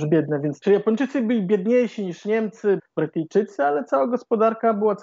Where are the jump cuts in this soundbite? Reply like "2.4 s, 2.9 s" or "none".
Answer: 2.8 s